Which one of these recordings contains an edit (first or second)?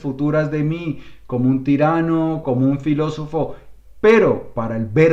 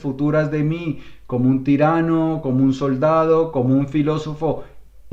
first